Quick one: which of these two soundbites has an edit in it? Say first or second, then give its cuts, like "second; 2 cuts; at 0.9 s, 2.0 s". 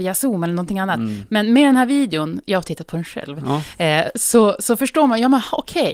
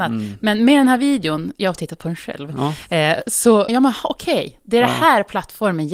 second; 1 cut; at 3.7 s